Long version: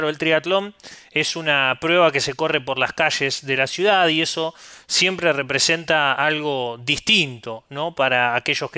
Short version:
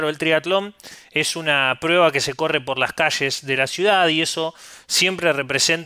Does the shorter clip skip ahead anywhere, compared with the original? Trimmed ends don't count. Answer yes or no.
no